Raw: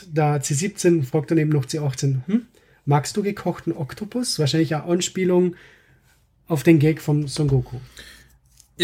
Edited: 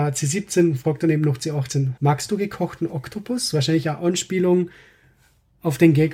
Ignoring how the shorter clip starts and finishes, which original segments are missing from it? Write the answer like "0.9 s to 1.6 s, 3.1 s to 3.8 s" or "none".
2.3 s to 2.8 s